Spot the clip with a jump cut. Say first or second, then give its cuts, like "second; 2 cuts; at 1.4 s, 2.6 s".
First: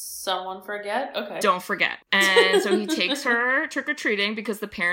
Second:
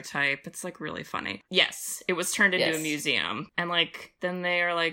second; 1 cut; at 1.4 s